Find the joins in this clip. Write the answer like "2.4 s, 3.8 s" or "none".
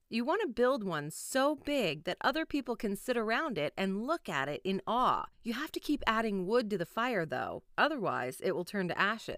5.3 s